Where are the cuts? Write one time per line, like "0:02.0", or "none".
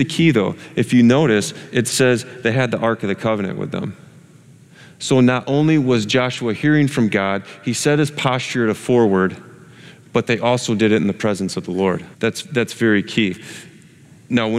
0:12.1